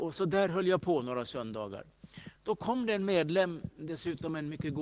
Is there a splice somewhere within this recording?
no; 0 cuts

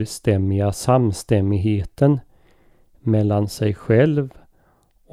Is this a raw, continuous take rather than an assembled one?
yes; 0 cuts

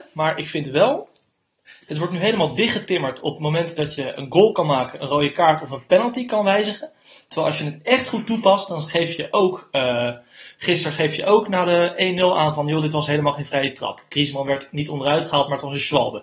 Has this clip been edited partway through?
no; 0 cuts

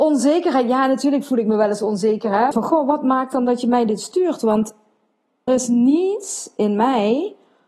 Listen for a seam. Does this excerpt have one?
yes; 2 cuts; at 2.5 s, 5.5 s

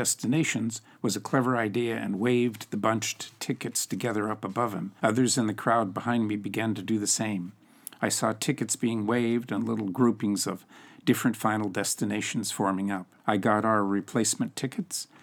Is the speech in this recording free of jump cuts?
no; 2 cuts; at 5.0 s, 13.2 s

